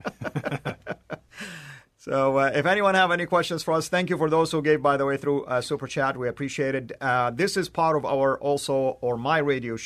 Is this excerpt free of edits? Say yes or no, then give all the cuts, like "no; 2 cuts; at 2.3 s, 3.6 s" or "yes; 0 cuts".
yes; 0 cuts